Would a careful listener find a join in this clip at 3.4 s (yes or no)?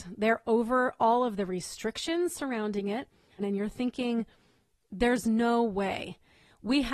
yes